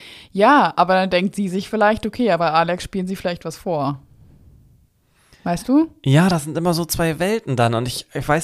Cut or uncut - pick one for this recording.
uncut